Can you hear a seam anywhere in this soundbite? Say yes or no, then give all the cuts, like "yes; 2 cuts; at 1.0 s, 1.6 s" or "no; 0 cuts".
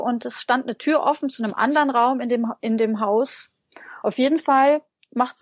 yes; 1 cut; at 4.0 s